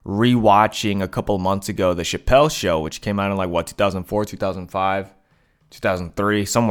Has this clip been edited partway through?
no; 0 cuts

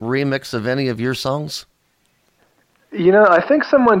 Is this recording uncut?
yes; 0 cuts

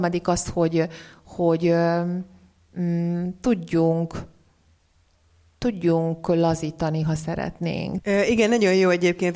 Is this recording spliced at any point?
yes; 1 cut; at 8.0 s

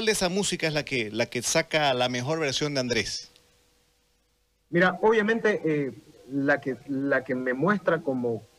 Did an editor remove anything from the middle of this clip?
no; 0 cuts

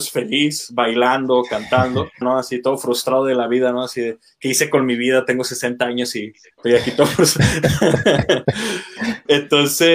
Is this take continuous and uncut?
no; 1 cut; at 2.2 s

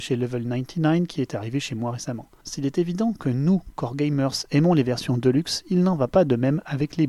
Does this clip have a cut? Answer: yes; 1 cut; at 2.4 s

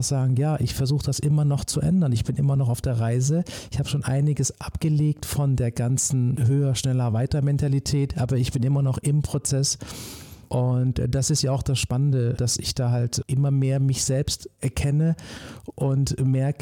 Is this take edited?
no; 0 cuts

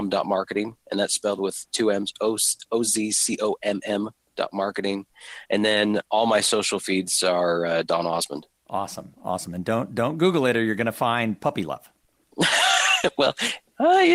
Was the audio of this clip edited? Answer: no; 0 cuts

